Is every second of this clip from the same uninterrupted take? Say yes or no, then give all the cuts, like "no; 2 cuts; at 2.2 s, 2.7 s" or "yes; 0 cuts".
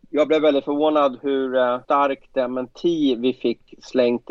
no; 1 cut; at 1.8 s